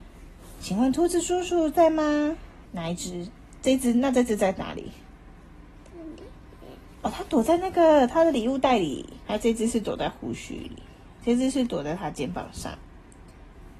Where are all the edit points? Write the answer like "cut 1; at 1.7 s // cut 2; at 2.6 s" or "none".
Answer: cut 1; at 2.7 s // cut 2; at 9.2 s